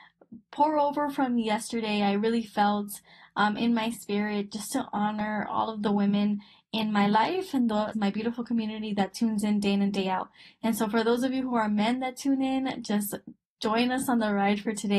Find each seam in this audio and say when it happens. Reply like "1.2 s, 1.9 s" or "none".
7.9 s